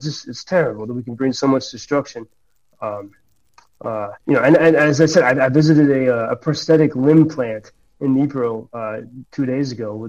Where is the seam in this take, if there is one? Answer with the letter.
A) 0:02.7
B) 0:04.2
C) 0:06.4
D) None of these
B